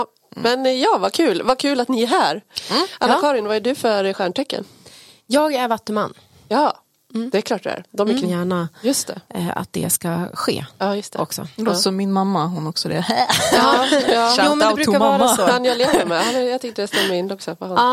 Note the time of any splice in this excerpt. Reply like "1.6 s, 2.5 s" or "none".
8.2 s

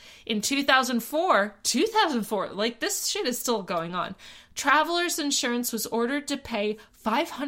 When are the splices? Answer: none

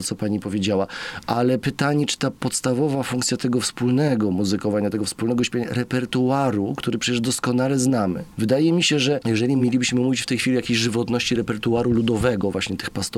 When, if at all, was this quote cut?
none

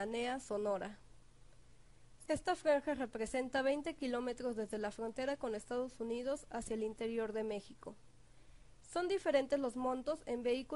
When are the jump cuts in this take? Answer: 2.3 s, 8.8 s

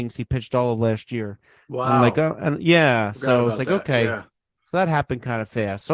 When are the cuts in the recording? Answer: none

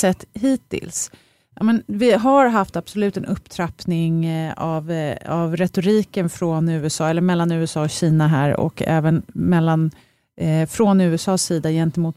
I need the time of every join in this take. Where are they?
none

